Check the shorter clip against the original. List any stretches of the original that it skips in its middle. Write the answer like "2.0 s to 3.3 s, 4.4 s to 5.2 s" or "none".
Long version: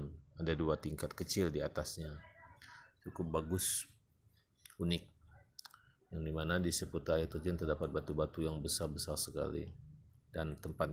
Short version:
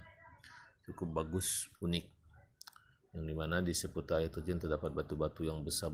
3.9 s to 4.7 s